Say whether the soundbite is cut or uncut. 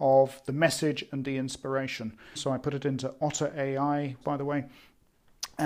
cut